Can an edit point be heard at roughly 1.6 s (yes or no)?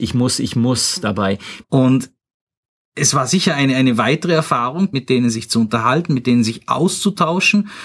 yes